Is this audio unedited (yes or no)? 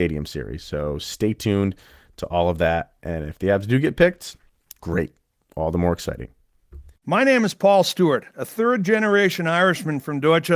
yes